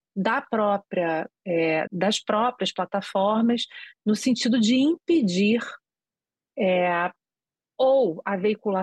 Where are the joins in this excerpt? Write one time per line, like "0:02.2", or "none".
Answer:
0:01.9